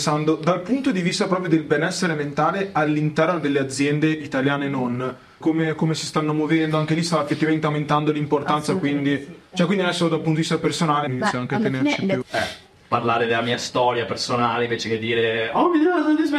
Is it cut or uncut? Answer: cut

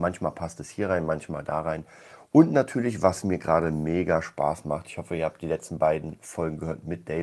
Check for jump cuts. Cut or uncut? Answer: uncut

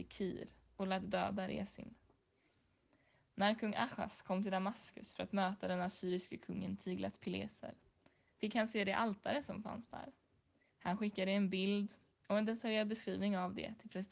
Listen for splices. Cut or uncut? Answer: uncut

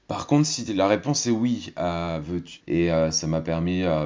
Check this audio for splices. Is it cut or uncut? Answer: cut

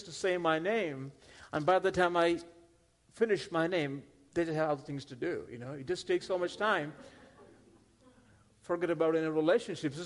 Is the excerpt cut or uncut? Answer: uncut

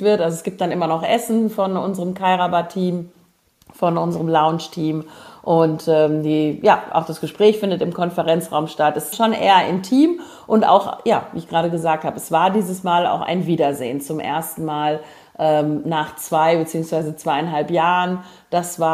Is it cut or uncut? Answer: cut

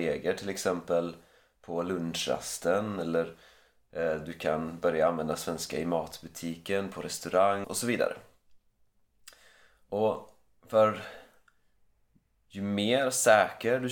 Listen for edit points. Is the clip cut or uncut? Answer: cut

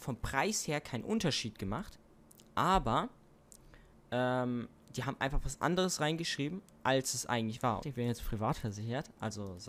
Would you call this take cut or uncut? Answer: cut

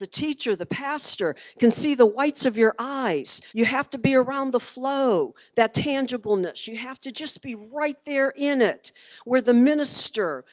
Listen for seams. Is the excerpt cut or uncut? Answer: cut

